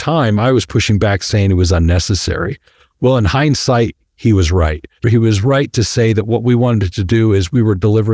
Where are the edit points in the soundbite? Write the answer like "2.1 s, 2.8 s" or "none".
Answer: 5.0 s